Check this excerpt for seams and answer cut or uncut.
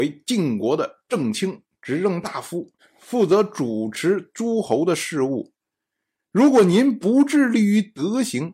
uncut